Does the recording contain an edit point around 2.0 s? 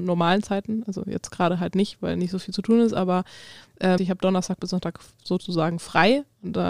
no; 1 cut; at 4.0 s

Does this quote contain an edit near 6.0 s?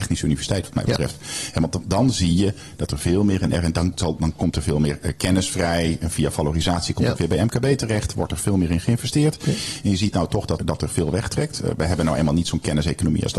no; 1 cut; at 10.6 s

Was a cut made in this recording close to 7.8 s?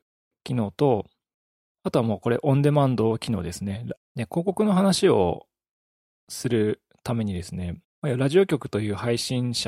yes; 2 cuts; at 4.0 s, 7.8 s

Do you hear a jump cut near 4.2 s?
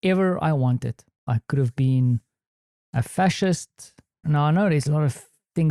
yes; 2 cuts; at 1.3 s, 4.2 s

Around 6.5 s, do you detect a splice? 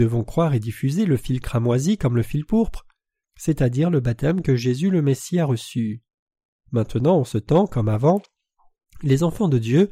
yes; 2 cuts; at 3.2 s, 6.5 s

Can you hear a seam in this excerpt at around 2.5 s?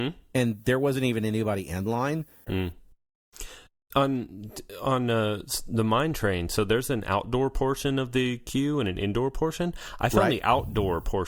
yes; 1 cut; at 2.5 s

